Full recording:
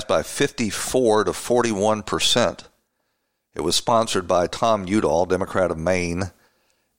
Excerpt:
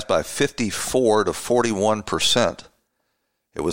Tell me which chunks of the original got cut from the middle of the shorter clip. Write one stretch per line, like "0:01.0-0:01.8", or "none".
none